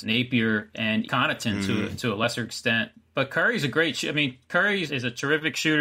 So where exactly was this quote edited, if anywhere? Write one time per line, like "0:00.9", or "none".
0:01.0